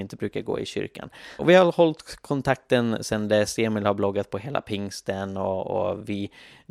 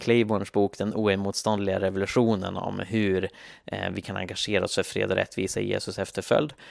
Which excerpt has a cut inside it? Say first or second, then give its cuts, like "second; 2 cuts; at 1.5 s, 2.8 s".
first; 1 cut; at 1.4 s